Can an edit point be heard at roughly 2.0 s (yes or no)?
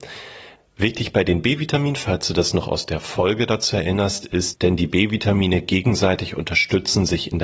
no